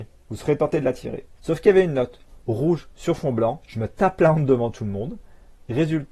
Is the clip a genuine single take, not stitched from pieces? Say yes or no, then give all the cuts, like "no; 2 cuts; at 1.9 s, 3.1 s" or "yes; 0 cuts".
no; 2 cuts; at 1.4 s, 3.7 s